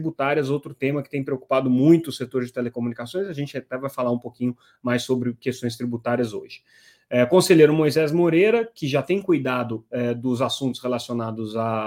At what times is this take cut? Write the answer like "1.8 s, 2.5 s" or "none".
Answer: none